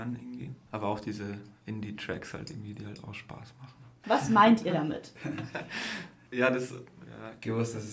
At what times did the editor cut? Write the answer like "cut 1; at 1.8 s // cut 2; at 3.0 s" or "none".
cut 1; at 4.0 s